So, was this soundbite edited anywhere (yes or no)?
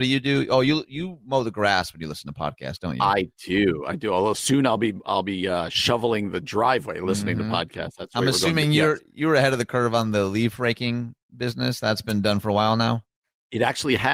no